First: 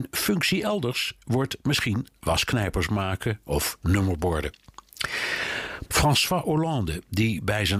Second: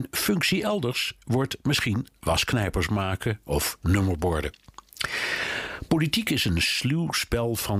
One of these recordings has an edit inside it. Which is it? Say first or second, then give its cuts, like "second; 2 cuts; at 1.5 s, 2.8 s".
first; 1 cut; at 5.9 s